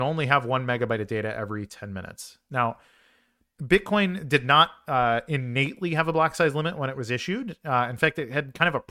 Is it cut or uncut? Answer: uncut